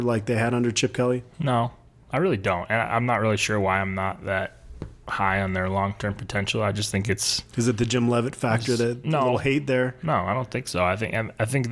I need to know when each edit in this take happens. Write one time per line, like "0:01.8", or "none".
none